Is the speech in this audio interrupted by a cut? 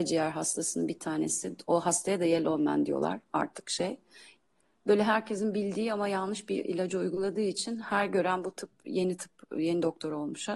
no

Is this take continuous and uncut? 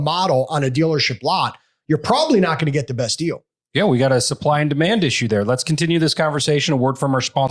yes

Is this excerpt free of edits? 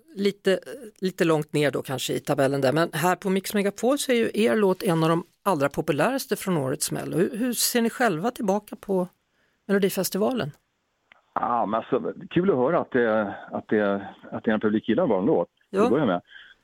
yes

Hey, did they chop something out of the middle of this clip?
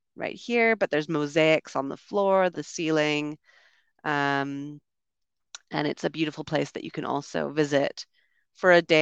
yes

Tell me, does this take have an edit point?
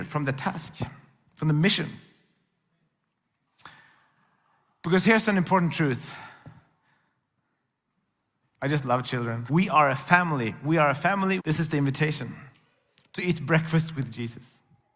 yes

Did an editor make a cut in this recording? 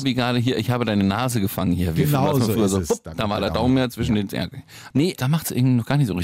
yes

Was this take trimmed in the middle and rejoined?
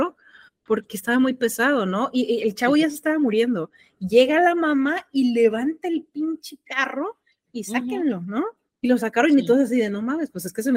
no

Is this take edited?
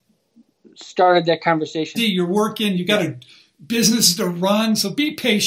yes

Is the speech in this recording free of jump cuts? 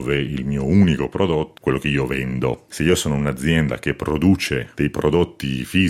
no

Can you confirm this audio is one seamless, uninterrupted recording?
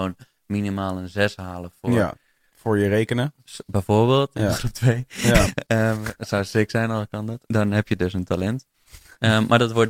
no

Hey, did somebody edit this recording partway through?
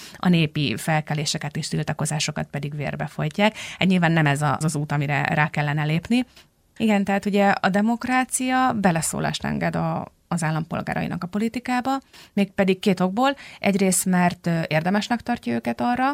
yes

